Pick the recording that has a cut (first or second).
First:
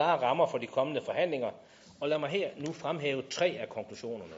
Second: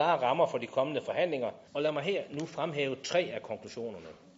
second